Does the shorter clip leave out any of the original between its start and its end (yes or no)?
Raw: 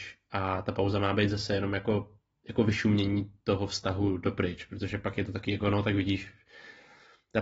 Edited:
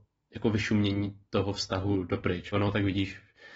yes